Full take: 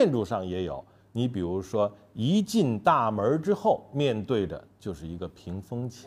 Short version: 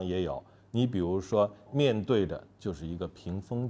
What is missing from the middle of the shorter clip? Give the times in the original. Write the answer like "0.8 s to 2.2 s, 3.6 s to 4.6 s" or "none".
2.1 s to 3.9 s